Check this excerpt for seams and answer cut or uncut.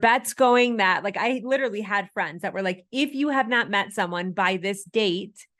uncut